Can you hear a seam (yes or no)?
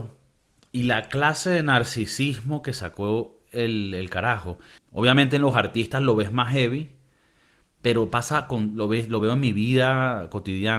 yes